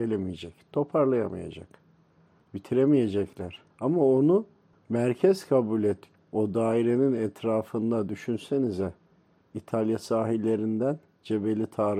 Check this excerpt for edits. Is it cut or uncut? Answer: cut